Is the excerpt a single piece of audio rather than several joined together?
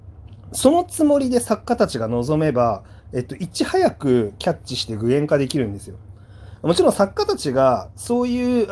yes; 0 cuts

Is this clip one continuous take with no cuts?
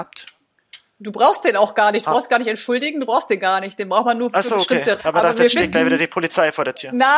no; 1 cut; at 5.0 s

